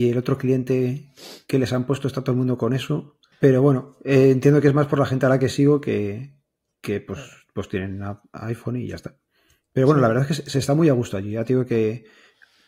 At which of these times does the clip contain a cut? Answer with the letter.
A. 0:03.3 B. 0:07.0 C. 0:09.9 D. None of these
A